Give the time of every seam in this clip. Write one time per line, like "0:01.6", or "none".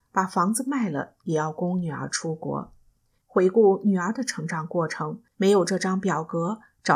0:03.2
0:05.3